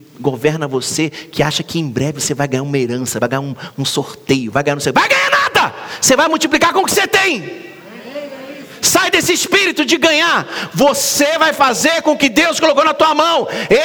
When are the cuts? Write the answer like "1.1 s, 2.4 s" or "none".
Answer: none